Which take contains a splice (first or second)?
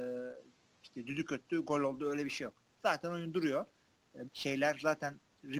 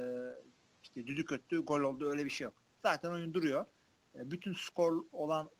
first